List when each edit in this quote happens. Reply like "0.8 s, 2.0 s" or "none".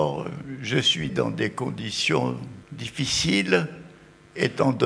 1.1 s, 2.6 s